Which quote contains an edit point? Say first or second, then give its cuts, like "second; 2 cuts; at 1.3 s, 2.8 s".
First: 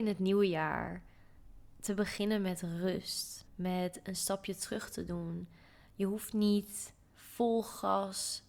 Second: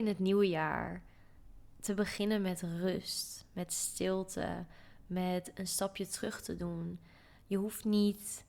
first; 1 cut; at 3.5 s